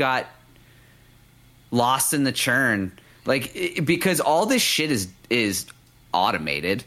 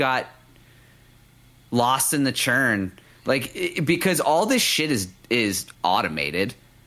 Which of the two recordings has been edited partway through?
second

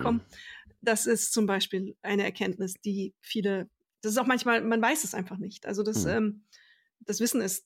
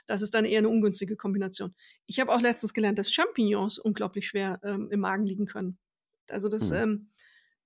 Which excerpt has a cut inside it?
second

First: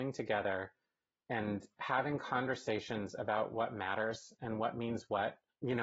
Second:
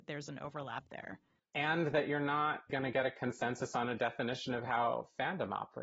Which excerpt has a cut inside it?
second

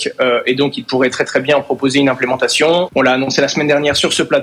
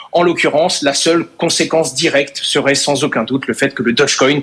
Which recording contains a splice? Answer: first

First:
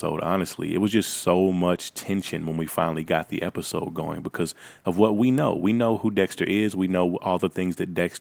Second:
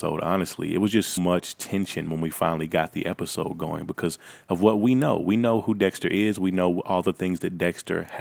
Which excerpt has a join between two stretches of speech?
second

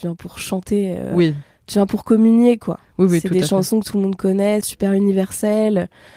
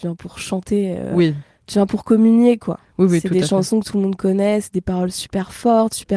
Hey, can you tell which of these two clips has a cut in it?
first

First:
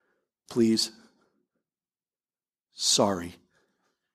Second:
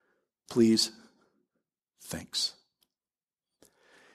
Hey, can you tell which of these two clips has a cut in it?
second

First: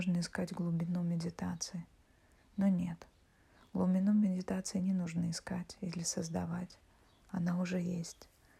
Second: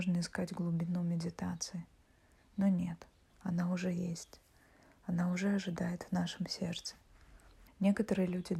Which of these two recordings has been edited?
second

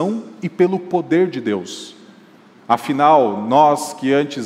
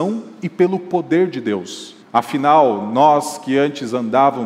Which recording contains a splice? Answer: second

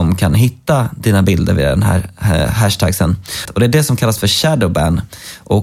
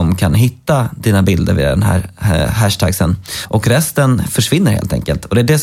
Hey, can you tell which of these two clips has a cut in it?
first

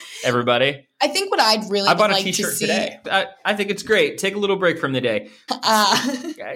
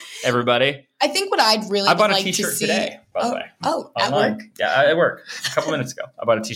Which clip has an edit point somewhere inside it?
first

